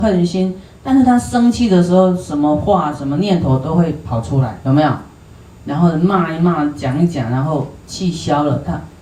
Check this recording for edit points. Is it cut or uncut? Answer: uncut